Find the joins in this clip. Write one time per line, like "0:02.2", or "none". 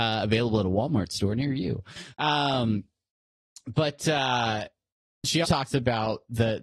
0:02.1
0:05.4